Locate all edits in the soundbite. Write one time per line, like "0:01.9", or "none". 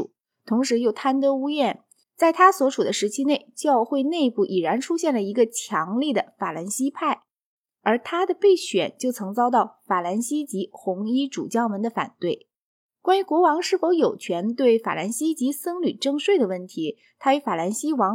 0:02.0